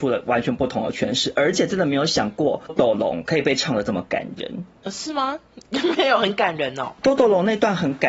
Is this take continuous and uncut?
no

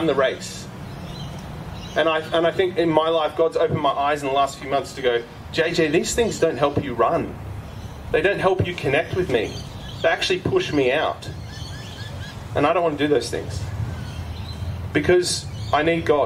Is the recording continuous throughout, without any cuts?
yes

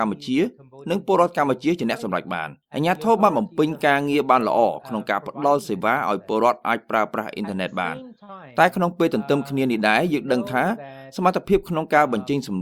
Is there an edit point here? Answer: yes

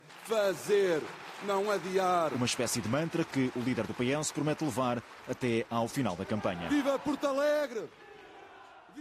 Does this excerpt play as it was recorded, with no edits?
yes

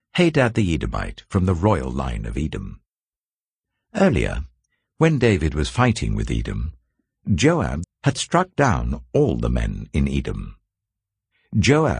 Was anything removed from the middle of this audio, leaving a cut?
yes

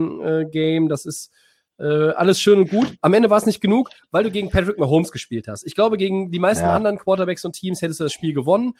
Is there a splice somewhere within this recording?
no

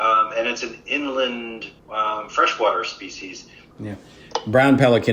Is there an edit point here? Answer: yes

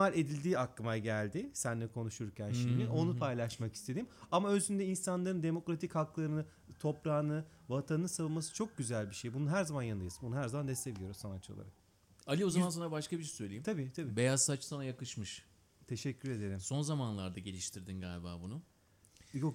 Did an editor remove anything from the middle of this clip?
no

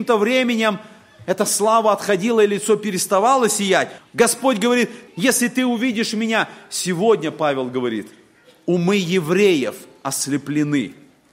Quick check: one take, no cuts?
no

